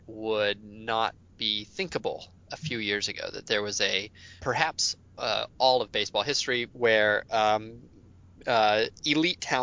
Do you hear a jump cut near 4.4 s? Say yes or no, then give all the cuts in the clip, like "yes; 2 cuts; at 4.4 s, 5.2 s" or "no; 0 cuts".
yes; 2 cuts; at 4.4 s, 6.7 s